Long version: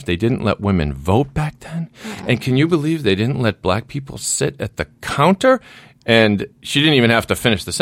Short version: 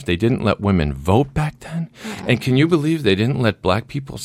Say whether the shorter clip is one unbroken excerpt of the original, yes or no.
yes